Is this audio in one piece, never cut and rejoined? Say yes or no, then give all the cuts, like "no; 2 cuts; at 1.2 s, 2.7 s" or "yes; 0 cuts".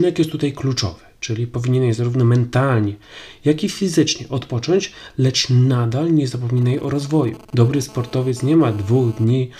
no; 1 cut; at 7.4 s